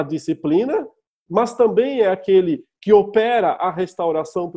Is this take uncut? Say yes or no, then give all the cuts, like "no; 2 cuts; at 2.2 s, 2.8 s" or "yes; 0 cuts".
yes; 0 cuts